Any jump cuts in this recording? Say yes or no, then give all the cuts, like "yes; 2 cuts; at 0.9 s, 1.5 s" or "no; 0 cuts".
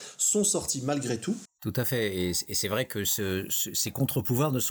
yes; 1 cut; at 1.5 s